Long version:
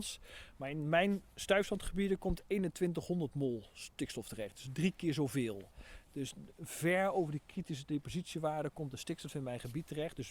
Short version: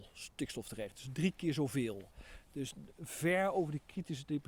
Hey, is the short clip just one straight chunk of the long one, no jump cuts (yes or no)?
yes